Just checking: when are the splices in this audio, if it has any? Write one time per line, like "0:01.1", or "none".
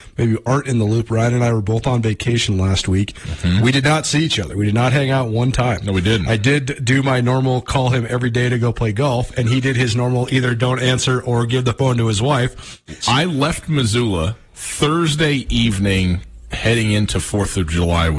0:13.0
0:14.5